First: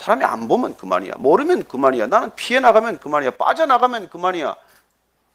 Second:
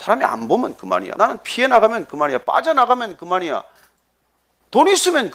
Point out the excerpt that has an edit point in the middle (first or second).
second